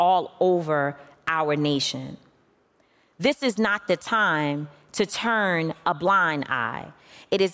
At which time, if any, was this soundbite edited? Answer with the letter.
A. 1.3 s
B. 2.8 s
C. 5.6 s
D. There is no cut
D